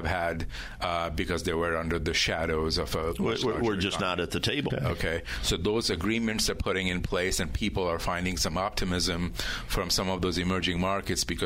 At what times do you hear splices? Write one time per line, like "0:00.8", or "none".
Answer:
0:04.7